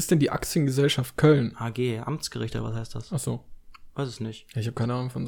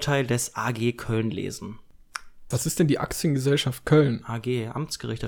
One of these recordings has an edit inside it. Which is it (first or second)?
second